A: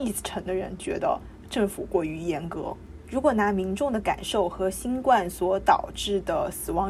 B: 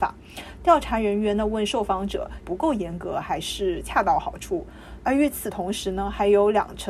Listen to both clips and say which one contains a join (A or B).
B